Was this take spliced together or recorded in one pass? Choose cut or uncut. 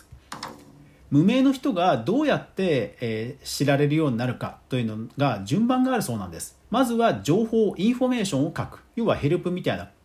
cut